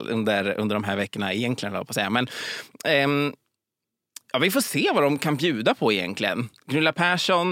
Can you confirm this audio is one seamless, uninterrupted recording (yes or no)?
yes